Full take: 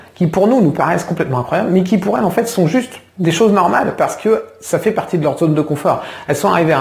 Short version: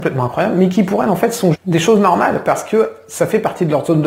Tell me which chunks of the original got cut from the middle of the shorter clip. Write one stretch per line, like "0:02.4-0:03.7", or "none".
0:02.7-0:03.1

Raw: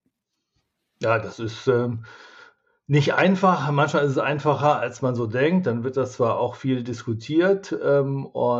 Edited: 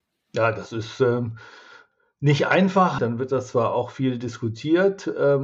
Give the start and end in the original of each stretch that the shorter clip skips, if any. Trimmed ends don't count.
0:03.7-0:05.6

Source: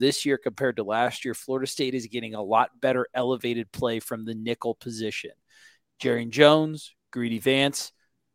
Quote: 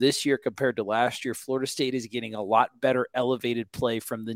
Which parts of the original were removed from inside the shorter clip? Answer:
none

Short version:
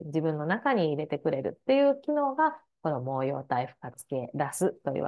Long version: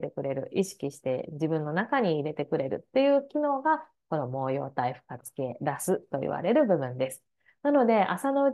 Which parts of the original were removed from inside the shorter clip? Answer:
none

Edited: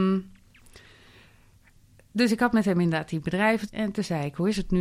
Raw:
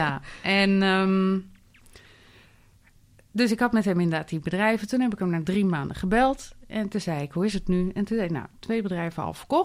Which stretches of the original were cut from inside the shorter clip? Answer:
0:04.9-0:06.6

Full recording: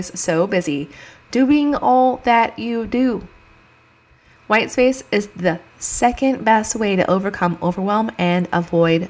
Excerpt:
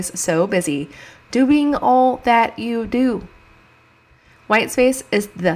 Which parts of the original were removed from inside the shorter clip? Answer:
none

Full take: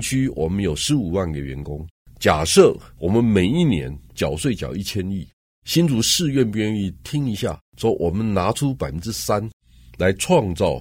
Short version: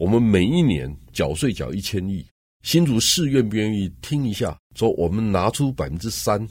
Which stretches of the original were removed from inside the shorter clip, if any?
none

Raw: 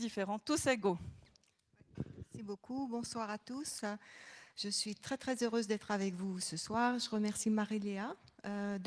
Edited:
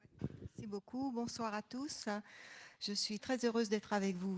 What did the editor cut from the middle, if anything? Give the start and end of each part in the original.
0:05.0-0:05.2

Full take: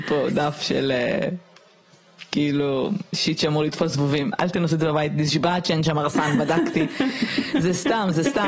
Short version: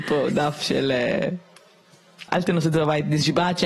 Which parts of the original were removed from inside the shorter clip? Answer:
0:02.3-0:04.4

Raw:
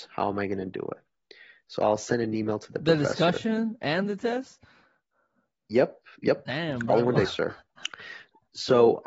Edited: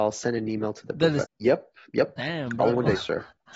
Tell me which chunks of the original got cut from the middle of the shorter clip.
0:03.1-0:05.5

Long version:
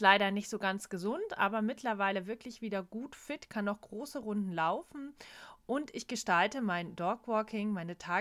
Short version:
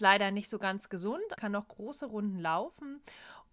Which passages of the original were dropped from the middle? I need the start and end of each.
0:01.4-0:03.5

